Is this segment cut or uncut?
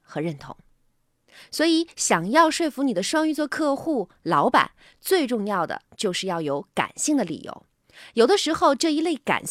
uncut